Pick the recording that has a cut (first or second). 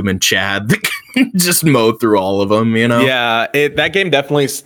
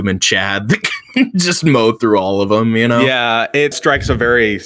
second